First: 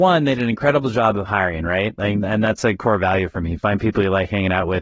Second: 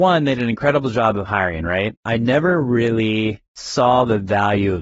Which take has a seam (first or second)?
second